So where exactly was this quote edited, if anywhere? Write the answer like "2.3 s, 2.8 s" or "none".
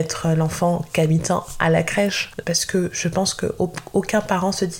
2.4 s

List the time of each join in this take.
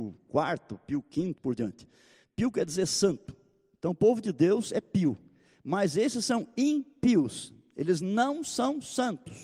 1.4 s

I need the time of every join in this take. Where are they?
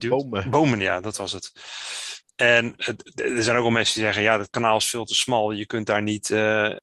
2.3 s

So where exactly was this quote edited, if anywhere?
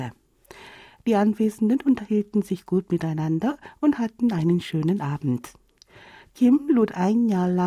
none

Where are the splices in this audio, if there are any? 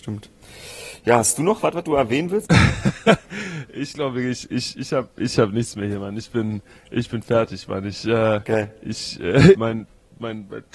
2.5 s, 9.5 s

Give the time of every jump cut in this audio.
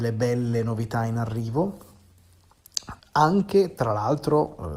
3.0 s

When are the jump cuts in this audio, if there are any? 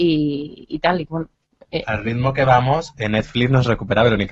none

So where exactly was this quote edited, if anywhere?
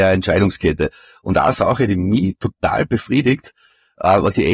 none

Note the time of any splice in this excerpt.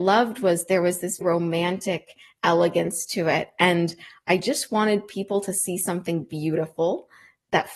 1.2 s

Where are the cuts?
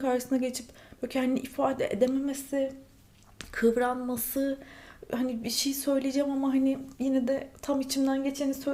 none

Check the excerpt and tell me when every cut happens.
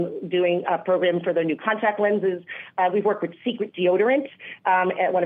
none

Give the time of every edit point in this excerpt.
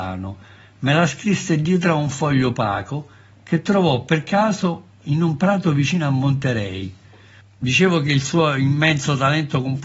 7.4 s

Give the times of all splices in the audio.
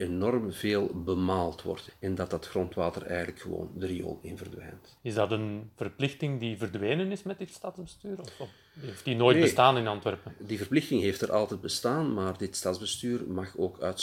none

